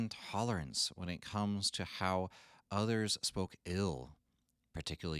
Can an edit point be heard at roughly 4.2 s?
no; 0 cuts

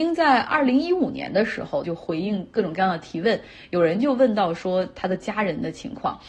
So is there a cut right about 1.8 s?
yes; 1 cut; at 1.8 s

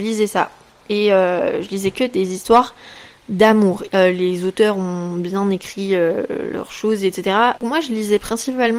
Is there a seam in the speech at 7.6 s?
yes; 2 cuts; at 3.9 s, 7.6 s

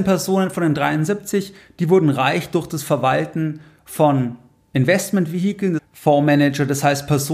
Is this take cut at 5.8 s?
yes; 1 cut; at 5.8 s

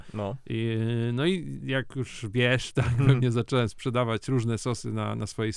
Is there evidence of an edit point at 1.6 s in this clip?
yes; 1 cut; at 1.6 s

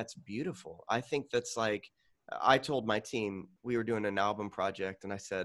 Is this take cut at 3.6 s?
yes; 1 cut; at 3.6 s

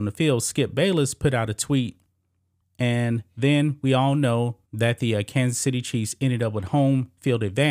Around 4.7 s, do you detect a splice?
yes; 2 cuts; at 2.6 s, 4.7 s

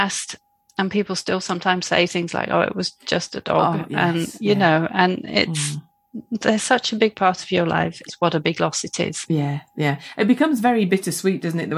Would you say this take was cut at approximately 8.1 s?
yes; 1 cut; at 8.1 s

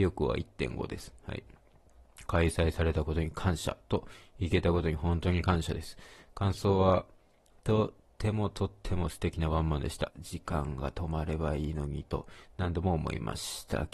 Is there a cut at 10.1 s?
yes; 2 cuts; at 2.3 s, 10.1 s

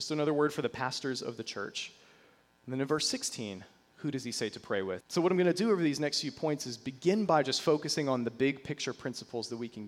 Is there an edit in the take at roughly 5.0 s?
yes; 1 cut; at 5.0 s

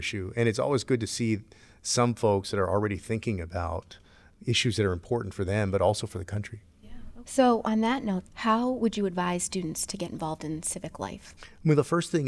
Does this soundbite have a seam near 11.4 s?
yes; 3 cuts; at 7.2 s, 8.3 s, 11.4 s

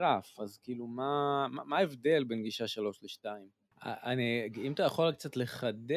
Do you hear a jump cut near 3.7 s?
yes; 1 cut; at 3.7 s

